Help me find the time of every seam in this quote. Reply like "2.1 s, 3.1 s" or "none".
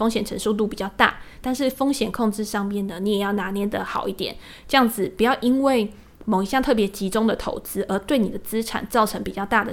1.4 s